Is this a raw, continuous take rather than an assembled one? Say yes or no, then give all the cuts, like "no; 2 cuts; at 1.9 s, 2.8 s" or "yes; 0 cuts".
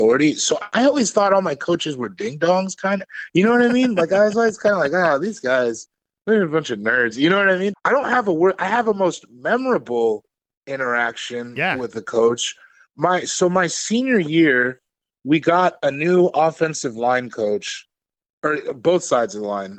no; 1 cut; at 7.7 s